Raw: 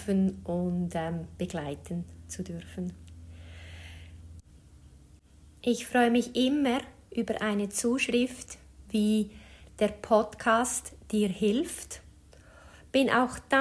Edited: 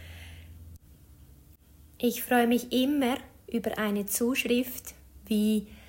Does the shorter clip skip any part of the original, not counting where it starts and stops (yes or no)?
no